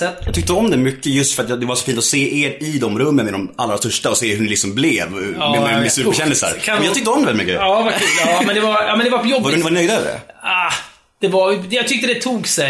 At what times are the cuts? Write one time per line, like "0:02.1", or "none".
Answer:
none